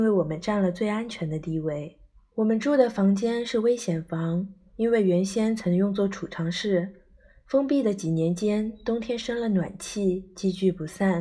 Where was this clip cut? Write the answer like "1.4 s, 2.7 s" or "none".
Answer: 2.2 s